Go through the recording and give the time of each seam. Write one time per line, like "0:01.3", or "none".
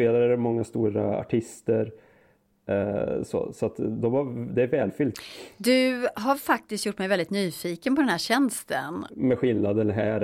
0:09.1